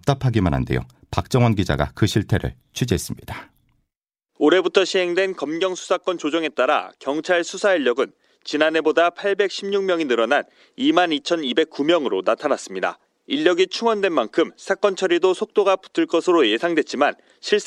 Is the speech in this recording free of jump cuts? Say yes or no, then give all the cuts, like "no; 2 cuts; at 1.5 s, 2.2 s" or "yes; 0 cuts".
yes; 0 cuts